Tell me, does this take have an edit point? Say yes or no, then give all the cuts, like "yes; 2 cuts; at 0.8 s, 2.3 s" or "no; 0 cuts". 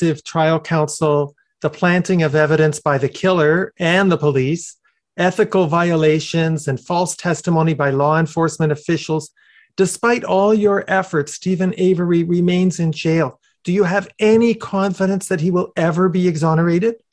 no; 0 cuts